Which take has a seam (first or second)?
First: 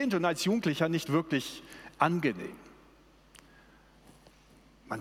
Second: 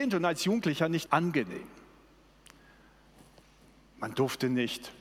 second